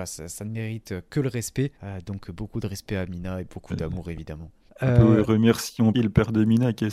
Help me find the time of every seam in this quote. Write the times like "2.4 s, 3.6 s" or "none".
1.8 s, 4.7 s, 5.9 s

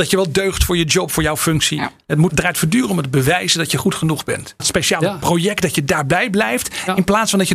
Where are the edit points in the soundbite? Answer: 2.3 s, 4.6 s

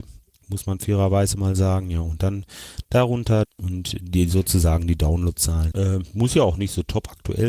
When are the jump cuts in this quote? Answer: 3.4 s, 5.7 s

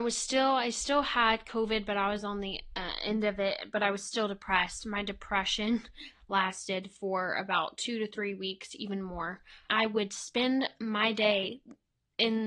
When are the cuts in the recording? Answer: 9.7 s

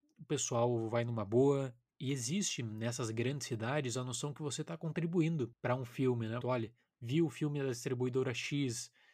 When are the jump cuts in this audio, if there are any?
6.4 s

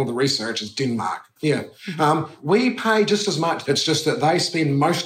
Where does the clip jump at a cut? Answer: 1.4 s, 3.7 s

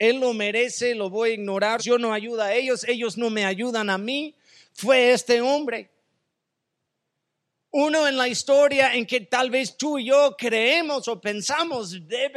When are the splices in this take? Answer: 1.8 s

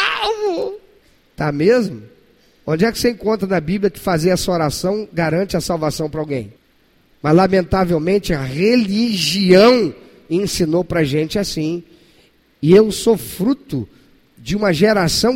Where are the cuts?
none

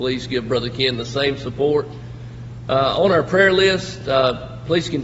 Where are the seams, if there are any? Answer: none

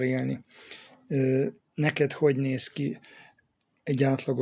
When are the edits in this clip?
none

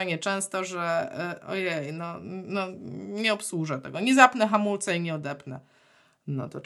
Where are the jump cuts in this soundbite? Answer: none

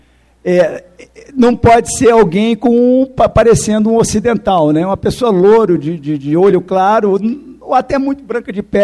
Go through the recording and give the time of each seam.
none

